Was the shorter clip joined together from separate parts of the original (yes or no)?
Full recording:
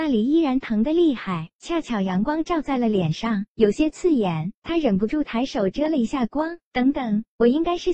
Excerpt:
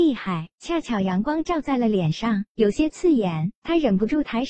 no